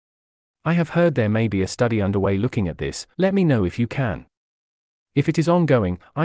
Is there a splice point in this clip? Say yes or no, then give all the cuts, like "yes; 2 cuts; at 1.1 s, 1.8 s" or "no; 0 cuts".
yes; 1 cut; at 3.1 s